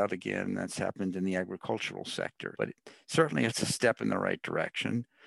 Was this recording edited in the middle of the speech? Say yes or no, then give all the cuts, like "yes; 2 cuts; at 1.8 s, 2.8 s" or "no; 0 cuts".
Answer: yes; 1 cut; at 2.5 s